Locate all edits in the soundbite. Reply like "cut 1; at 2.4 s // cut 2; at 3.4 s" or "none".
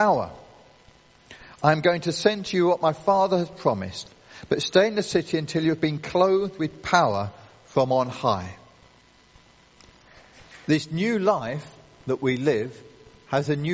none